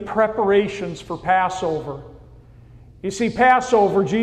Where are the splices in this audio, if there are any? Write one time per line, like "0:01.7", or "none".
none